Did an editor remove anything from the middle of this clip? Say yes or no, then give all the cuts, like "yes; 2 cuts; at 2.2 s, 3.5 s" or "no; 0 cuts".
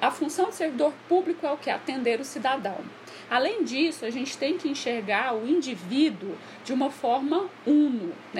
yes; 1 cut; at 3.3 s